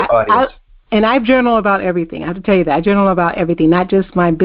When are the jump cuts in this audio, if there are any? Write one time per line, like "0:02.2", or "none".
none